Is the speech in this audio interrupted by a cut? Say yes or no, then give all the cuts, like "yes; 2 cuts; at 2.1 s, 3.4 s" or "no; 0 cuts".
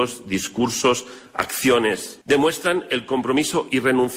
yes; 1 cut; at 2.2 s